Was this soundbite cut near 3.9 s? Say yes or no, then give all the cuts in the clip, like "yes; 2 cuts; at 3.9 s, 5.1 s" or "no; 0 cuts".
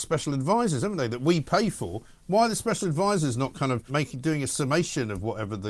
yes; 1 cut; at 3.9 s